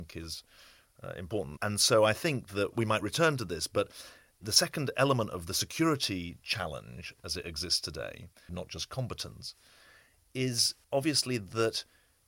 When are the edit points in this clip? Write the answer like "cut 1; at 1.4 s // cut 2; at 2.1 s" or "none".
cut 1; at 1.6 s // cut 2; at 8.5 s // cut 3; at 10.8 s